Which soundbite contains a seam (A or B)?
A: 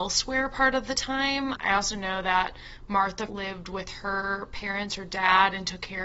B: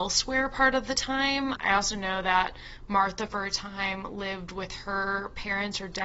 A